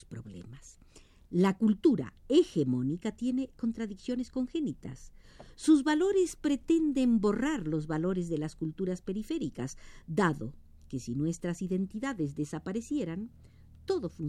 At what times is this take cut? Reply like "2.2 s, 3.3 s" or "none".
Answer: none